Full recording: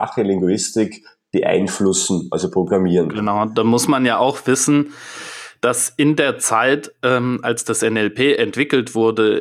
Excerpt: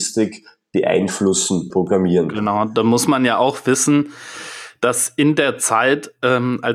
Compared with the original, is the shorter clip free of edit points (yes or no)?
no